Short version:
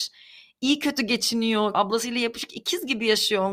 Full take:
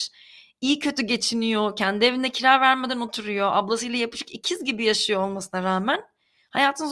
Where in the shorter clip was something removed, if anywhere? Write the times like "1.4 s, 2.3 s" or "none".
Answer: 1.7 s